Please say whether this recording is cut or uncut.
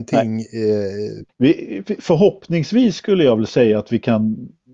cut